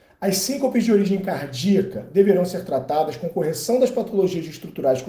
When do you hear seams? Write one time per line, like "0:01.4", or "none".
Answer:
none